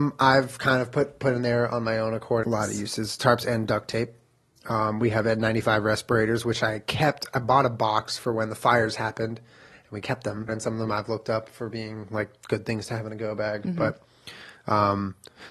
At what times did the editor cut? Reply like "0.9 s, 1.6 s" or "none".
2.4 s, 10.5 s

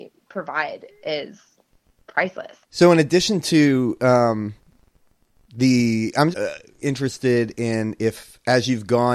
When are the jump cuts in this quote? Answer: 2.6 s, 6.3 s

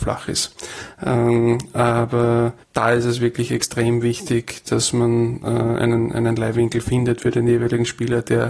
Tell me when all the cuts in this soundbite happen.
2.6 s

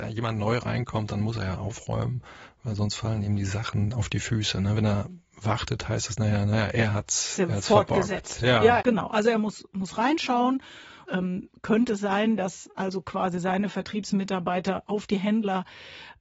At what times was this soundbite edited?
8.8 s, 11.1 s

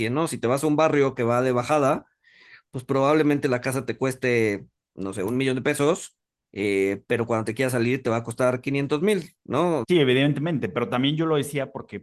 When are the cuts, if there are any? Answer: 9.8 s

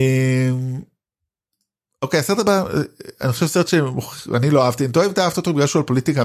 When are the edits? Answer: none

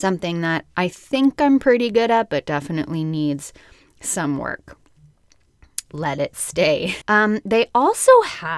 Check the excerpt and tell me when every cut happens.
5.8 s, 7.0 s

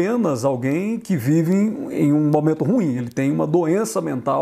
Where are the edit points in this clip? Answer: none

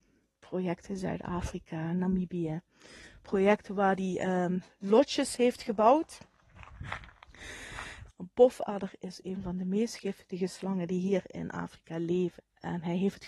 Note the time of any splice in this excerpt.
8.1 s, 12.4 s

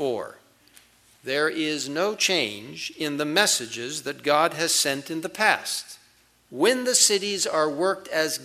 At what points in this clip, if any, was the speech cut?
6.5 s

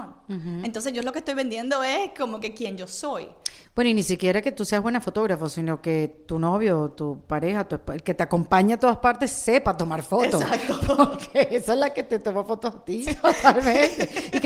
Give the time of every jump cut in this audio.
13.0 s

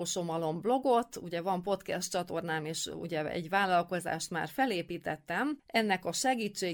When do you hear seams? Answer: none

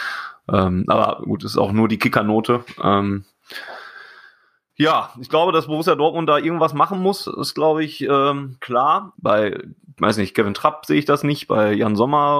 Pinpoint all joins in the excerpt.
9.1 s

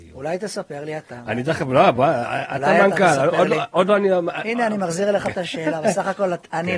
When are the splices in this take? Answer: none

